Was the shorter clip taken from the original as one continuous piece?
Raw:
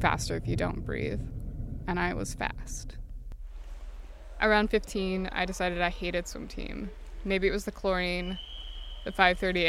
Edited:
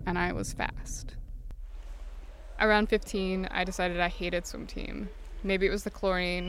yes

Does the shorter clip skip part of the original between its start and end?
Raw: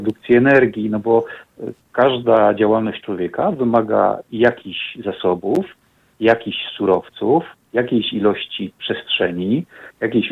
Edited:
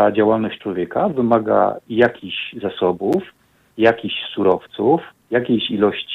no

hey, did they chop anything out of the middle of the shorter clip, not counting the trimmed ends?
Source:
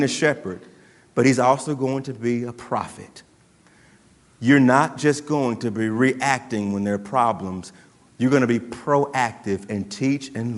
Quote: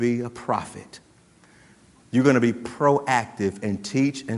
yes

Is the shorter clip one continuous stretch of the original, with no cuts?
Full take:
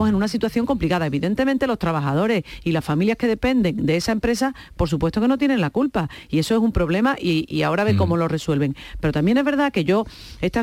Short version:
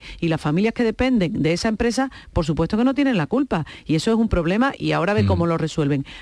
no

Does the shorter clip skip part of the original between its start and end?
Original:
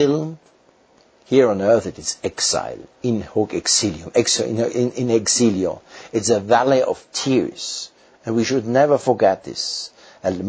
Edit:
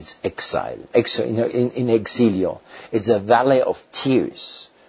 yes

